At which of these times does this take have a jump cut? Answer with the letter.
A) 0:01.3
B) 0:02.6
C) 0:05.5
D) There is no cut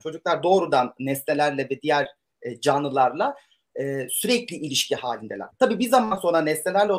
C